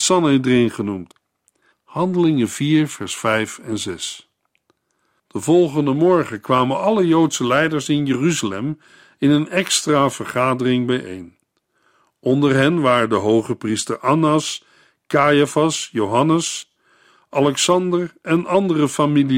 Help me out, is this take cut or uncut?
cut